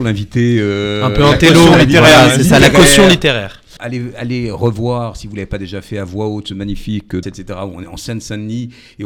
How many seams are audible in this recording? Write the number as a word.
two